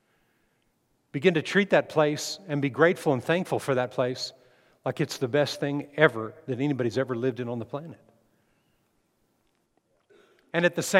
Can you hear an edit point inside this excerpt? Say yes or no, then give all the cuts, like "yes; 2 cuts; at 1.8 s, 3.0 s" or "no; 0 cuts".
no; 0 cuts